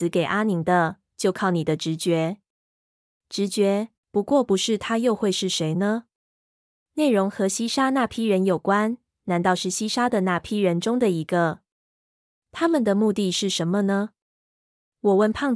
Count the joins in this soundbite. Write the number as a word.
two